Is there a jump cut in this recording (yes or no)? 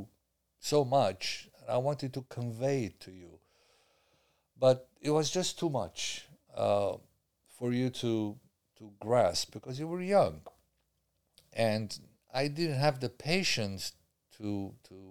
no